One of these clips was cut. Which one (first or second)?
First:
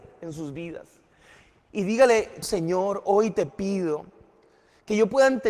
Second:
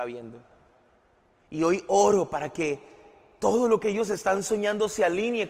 first